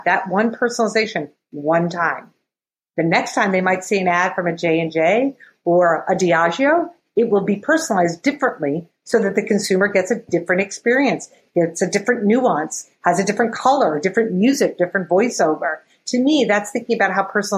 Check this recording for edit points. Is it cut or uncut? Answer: uncut